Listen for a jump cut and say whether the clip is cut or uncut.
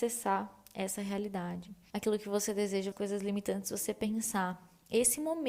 cut